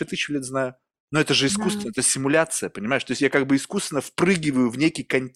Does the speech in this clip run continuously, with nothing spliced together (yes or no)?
yes